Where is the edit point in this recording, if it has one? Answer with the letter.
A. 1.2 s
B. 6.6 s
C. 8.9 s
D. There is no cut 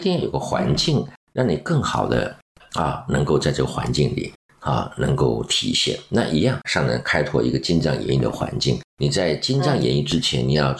B